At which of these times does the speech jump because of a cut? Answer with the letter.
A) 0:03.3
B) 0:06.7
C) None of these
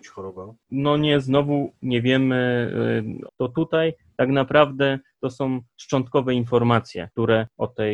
A